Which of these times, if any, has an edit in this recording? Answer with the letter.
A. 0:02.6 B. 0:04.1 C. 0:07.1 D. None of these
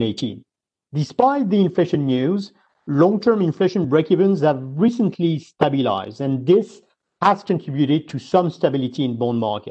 D